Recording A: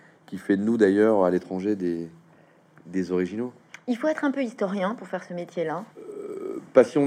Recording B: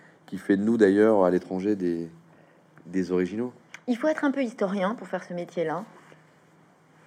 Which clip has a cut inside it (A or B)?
A